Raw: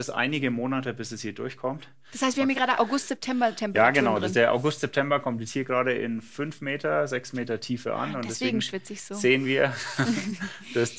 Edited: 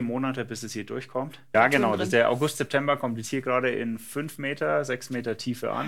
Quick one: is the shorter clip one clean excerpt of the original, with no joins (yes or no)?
no